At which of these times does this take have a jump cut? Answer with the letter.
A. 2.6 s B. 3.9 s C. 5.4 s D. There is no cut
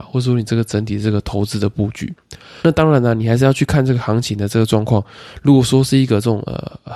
A